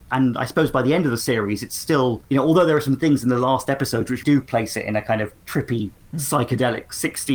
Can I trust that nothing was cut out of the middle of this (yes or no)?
no